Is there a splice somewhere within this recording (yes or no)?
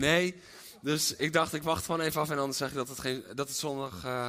no